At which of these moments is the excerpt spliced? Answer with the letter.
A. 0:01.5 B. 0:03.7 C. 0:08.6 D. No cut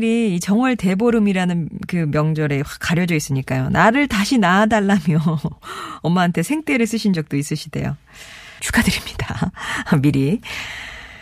C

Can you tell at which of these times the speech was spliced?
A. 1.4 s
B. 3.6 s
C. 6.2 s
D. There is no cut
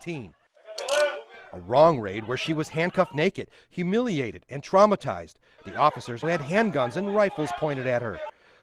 C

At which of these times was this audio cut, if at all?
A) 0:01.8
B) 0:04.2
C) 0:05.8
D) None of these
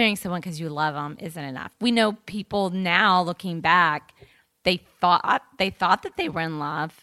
D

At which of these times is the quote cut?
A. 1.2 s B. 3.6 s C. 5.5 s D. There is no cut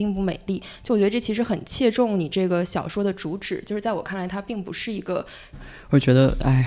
C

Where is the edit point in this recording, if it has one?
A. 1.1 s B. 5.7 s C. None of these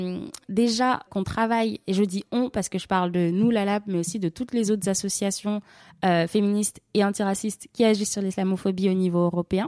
A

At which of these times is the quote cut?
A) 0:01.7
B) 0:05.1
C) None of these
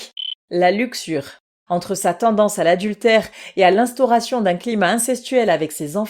A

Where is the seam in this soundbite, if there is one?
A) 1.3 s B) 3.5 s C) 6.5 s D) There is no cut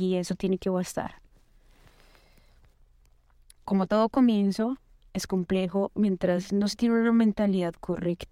D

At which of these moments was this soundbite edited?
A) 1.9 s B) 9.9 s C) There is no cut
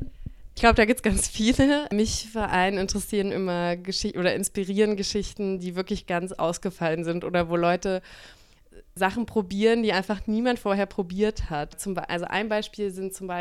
C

